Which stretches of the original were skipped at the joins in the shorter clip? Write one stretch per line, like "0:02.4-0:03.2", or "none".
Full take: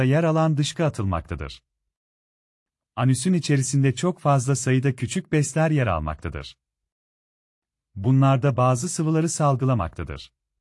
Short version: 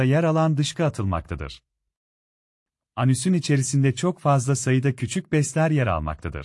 none